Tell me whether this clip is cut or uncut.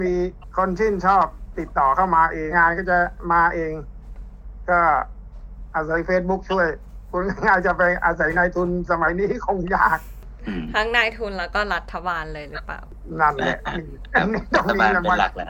cut